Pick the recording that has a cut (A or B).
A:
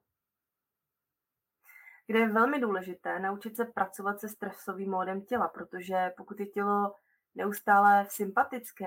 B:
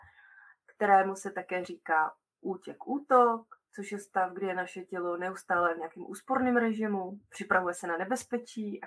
A